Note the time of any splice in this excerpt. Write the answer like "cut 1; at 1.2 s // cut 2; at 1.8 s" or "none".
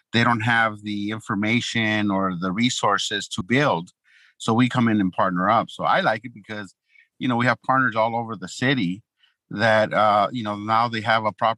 cut 1; at 3.4 s